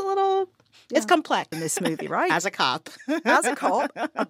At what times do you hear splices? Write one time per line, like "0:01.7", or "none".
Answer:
0:01.5